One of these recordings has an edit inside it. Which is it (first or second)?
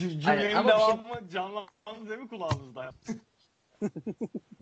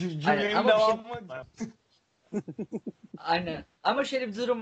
second